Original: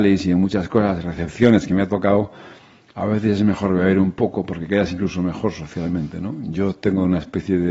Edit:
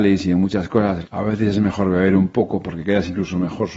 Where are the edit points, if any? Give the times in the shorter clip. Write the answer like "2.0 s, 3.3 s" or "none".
1.0 s